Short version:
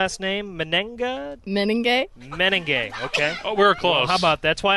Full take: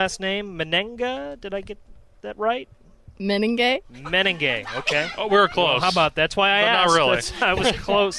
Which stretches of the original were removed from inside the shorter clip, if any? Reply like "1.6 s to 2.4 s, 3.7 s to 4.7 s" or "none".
1.4 s to 3.1 s